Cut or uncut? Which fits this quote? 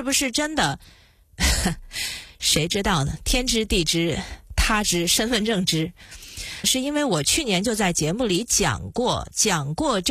cut